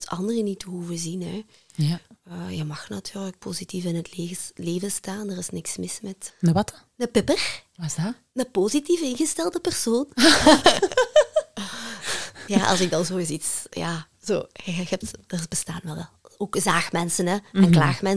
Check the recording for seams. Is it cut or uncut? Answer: cut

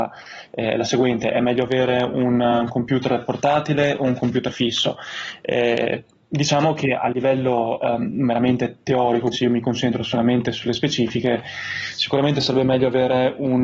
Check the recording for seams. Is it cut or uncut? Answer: cut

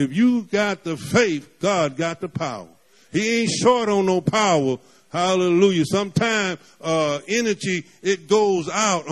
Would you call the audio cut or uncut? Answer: uncut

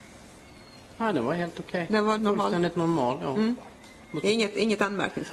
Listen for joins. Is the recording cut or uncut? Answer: cut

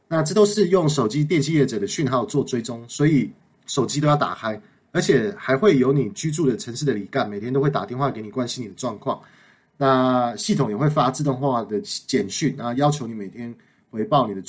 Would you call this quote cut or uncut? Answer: cut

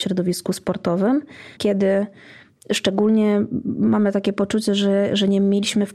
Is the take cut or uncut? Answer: cut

